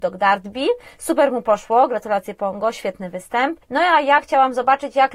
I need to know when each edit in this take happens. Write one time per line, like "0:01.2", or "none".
none